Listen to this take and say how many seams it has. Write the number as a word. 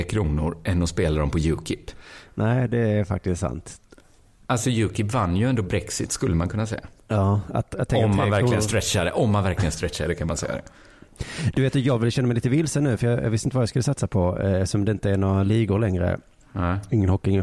zero